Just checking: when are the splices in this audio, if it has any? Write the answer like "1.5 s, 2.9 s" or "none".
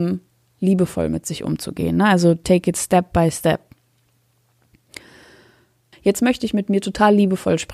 5.9 s